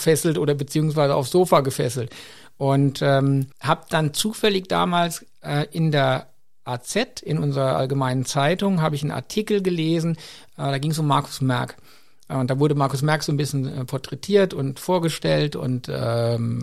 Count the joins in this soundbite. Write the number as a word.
one